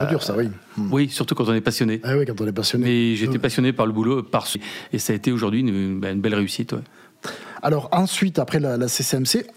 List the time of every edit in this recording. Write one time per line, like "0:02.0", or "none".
0:04.6